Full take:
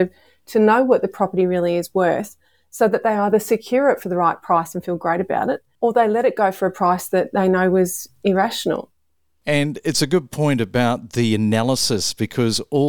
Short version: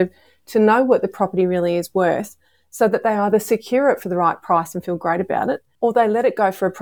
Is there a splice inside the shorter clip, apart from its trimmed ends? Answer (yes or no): no